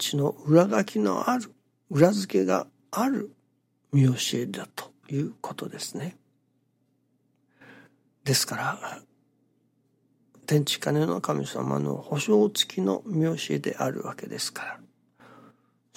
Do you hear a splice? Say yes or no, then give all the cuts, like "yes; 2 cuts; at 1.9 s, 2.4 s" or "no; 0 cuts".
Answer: no; 0 cuts